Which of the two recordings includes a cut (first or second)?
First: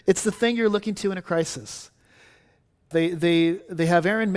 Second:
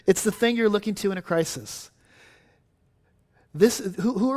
first